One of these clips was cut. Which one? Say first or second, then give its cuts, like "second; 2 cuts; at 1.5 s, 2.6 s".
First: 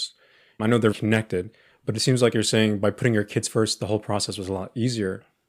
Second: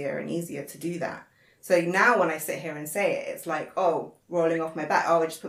first; 1 cut; at 0.9 s